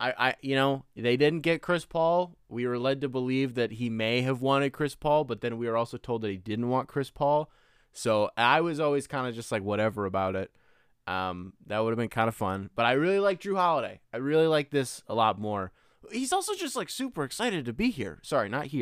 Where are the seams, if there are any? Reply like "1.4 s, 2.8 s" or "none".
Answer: none